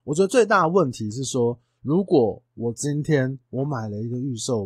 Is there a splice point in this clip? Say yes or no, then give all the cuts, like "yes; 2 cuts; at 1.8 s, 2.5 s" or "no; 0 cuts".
no; 0 cuts